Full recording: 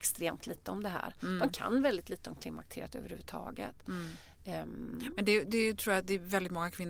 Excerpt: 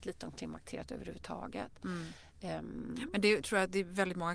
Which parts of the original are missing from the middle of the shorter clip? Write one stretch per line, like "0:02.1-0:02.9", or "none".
0:05.5-0:05.8